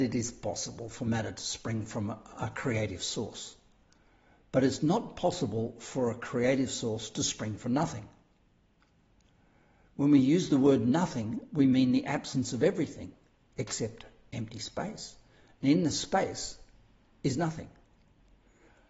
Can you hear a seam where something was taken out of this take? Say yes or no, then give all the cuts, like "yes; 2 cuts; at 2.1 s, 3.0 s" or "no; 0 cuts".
no; 0 cuts